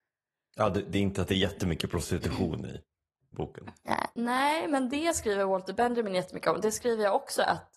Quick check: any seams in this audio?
no; 0 cuts

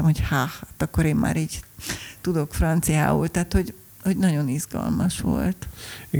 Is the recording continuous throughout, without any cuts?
yes; 0 cuts

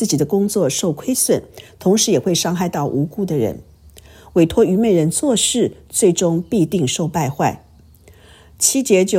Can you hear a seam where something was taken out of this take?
no; 0 cuts

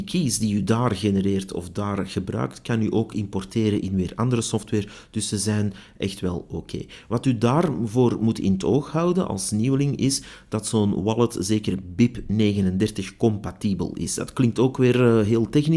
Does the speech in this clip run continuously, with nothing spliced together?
yes; 0 cuts

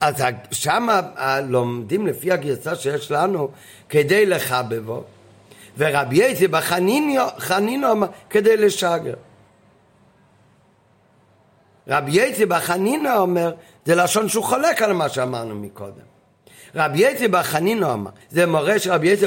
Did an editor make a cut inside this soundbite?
yes; 1 cut; at 18.2 s

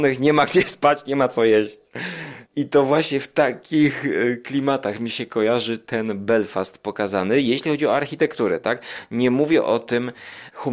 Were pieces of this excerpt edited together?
yes; 1 cut; at 2.5 s

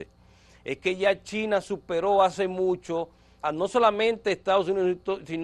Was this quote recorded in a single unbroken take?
no; 1 cut; at 3.4 s

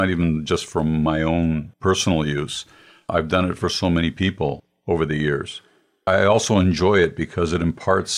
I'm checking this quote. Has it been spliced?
no; 0 cuts

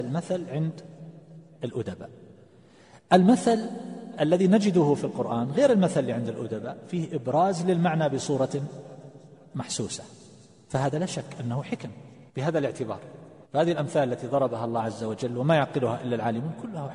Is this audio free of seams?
no; 2 cuts; at 12.3 s, 13.4 s

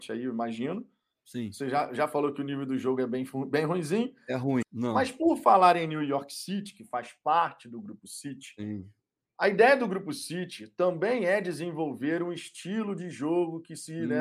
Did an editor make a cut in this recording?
yes; 1 cut; at 4.6 s

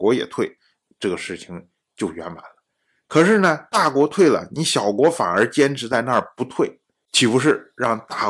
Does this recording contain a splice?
no; 0 cuts

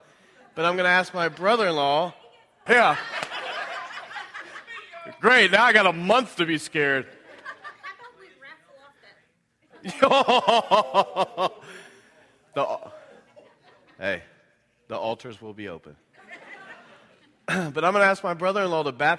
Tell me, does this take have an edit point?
yes; 1 cut; at 2.7 s

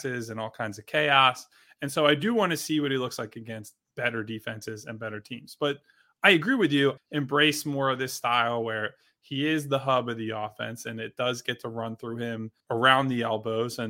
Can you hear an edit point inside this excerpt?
yes; 2 cuts; at 7.0 s, 12.6 s

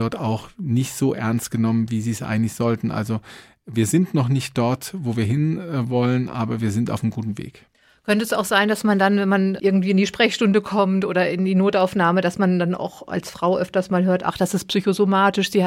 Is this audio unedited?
yes; 0 cuts

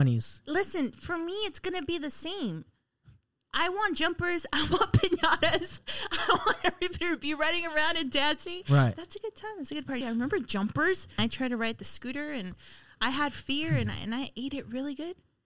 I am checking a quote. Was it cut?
yes; 2 cuts; at 10.0 s, 11.2 s

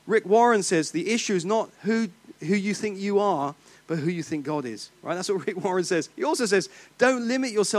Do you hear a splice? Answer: no; 0 cuts

